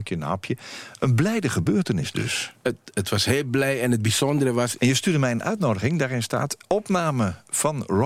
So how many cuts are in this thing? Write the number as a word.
one